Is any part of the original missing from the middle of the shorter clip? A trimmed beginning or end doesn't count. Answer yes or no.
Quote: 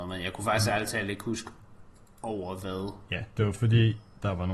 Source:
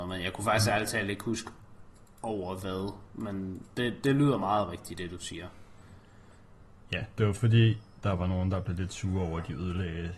yes